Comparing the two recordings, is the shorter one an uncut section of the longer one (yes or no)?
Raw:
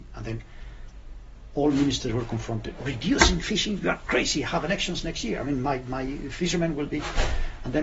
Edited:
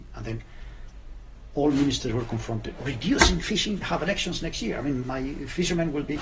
no